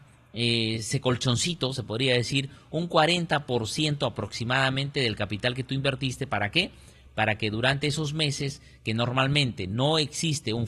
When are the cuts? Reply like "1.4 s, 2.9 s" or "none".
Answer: none